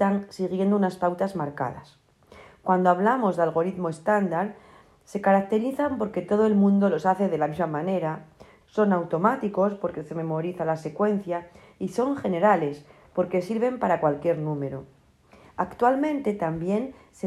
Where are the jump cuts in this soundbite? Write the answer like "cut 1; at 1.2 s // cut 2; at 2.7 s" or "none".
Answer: cut 1; at 8.6 s